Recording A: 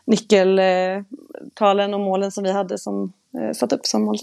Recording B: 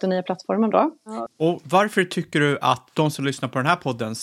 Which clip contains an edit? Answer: B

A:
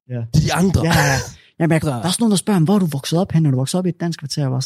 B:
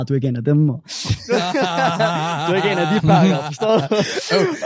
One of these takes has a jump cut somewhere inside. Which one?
A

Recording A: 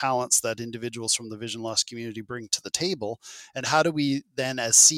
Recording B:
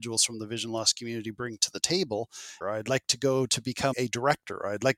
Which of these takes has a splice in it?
B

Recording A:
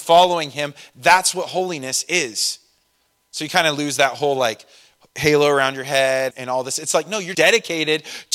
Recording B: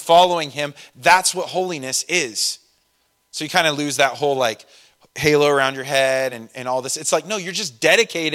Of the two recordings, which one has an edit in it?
A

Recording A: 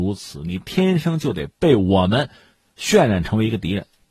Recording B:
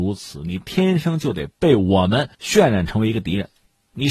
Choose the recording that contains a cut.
B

